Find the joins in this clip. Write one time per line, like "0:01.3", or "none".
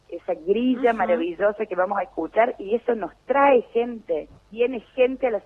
0:04.4

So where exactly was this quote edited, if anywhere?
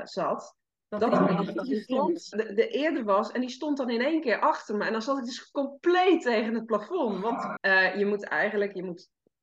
0:02.3
0:07.6

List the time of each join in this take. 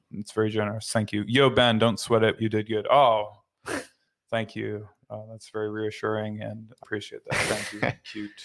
0:02.4
0:06.8

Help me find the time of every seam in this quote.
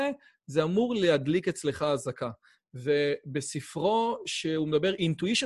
0:02.6

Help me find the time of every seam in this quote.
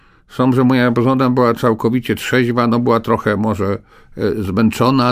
none

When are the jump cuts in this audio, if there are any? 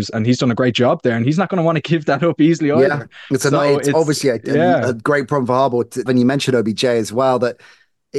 0:06.1

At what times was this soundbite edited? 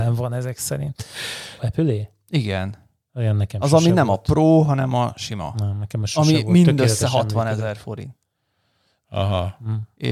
0:01.6

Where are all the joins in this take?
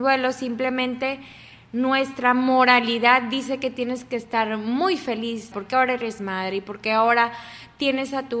0:05.5

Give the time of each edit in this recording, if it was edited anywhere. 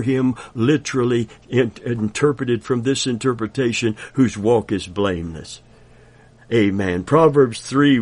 none

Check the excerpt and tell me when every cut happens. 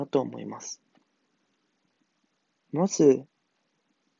none

